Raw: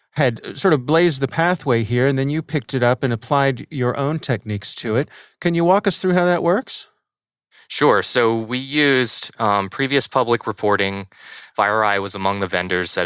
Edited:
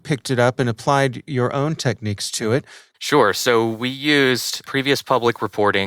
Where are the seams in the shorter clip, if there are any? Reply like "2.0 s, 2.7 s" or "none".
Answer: 2.9 s, 4.6 s